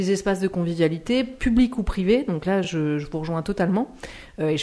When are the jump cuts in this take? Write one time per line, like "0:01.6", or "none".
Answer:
none